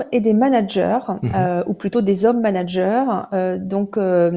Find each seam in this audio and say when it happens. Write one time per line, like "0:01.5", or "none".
none